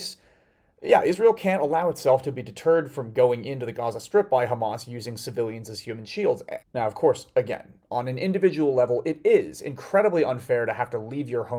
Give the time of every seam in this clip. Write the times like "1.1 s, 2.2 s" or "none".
6.6 s